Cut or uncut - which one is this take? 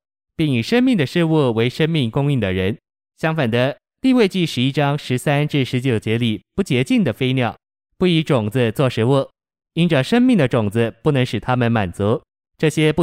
uncut